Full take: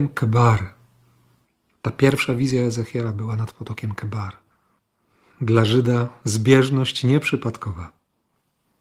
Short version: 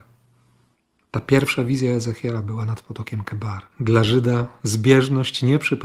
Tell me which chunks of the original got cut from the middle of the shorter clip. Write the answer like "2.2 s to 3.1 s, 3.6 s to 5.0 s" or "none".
4.4 s to 5.3 s